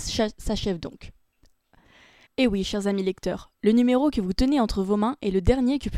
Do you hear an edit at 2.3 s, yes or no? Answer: yes